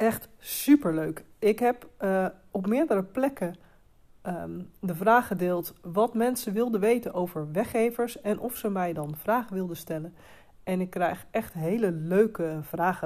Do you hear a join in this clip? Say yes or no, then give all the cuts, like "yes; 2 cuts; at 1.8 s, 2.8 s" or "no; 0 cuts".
no; 0 cuts